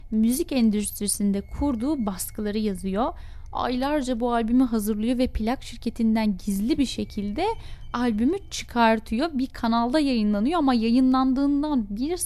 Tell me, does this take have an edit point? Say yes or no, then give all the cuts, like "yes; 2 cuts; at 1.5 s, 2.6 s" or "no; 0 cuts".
no; 0 cuts